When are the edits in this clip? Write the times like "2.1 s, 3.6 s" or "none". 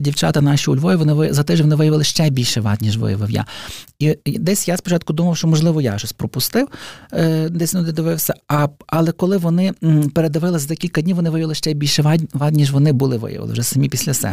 none